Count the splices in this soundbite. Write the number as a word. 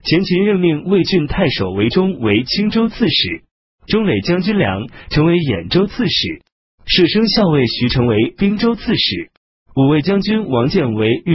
zero